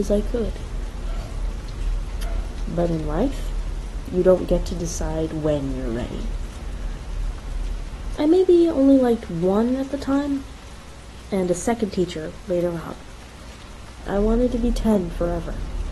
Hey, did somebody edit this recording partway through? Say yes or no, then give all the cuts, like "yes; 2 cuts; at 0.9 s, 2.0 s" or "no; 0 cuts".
yes; 2 cuts; at 8.2 s, 14.1 s